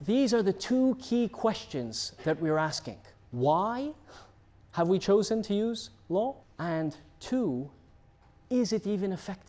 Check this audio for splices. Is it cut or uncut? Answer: uncut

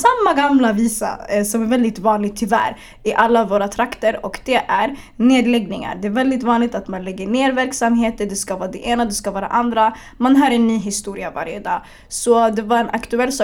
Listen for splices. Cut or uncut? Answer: uncut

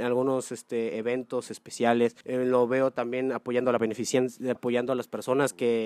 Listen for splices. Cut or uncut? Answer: cut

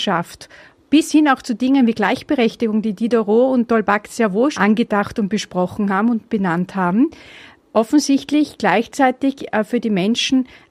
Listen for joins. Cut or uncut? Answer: cut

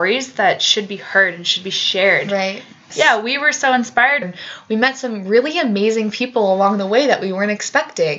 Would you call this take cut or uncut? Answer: cut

